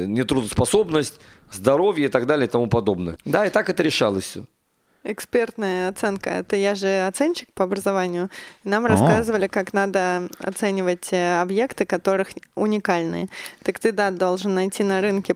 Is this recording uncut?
no; 1 cut; at 3.2 s

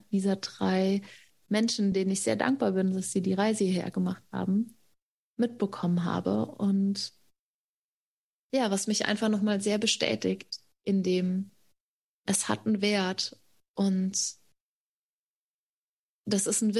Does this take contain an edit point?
no; 0 cuts

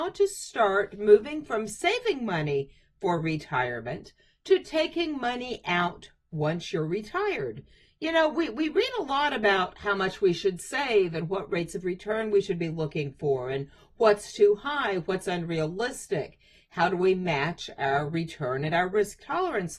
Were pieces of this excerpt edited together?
no; 0 cuts

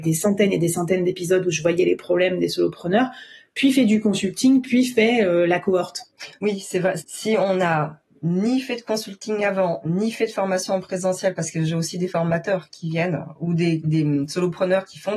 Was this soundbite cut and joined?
yes; 2 cuts; at 7.0 s, 13.8 s

